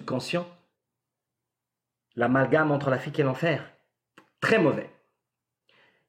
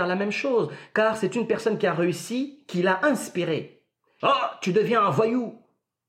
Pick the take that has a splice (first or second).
second